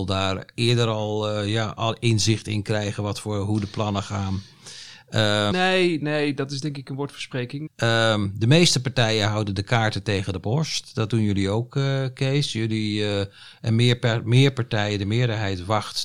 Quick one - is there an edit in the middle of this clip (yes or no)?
yes